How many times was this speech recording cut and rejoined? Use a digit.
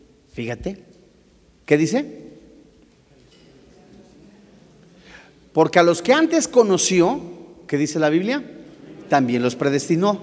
0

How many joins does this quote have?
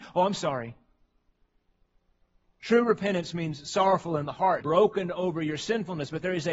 2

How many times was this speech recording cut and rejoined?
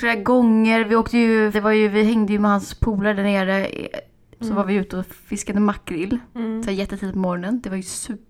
2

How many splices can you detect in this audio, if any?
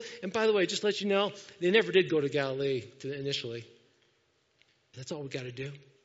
1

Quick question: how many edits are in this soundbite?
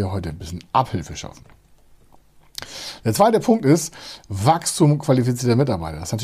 0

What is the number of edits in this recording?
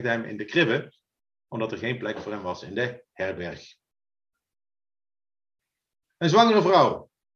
0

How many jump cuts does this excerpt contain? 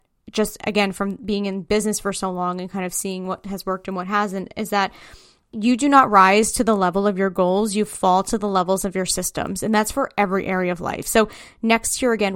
0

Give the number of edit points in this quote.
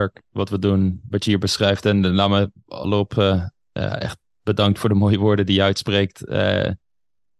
2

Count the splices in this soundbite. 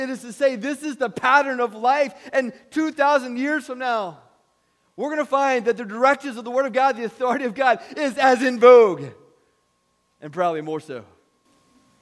0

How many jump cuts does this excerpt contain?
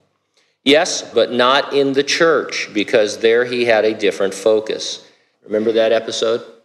2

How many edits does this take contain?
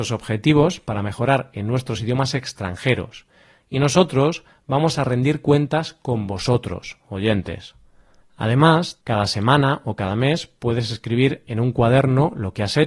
1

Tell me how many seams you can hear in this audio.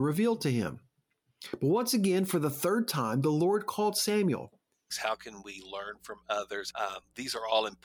2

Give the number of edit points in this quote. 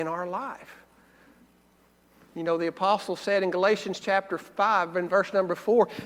0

